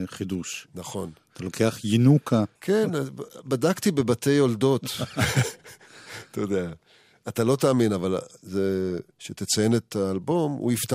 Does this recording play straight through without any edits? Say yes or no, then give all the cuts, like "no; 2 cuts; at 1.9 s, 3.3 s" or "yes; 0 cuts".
no; 2 cuts; at 2.6 s, 9.1 s